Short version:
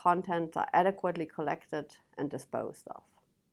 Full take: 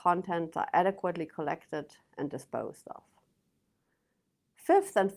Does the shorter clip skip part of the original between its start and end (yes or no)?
no